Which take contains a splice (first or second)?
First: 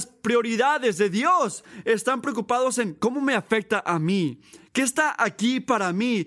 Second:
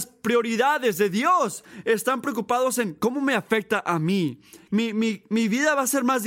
second